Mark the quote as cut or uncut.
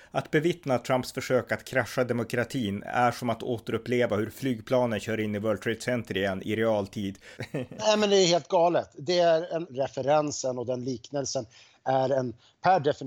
cut